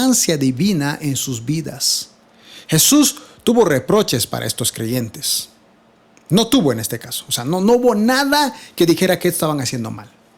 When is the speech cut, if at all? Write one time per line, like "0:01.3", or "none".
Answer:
none